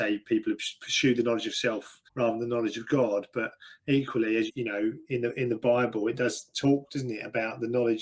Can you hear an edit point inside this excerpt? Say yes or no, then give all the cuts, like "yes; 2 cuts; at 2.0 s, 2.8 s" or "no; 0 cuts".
yes; 2 cuts; at 2.1 s, 4.5 s